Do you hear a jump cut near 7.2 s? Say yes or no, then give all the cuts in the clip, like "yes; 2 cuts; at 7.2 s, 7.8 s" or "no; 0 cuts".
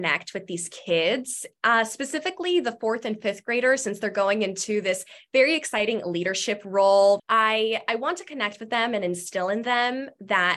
yes; 1 cut; at 7.2 s